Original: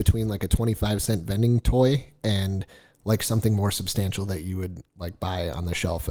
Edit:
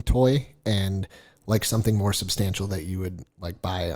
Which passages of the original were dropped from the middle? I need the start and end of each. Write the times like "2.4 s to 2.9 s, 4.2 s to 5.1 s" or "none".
none